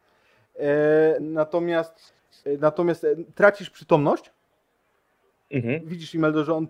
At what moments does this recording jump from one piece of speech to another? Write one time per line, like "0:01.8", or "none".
0:01.2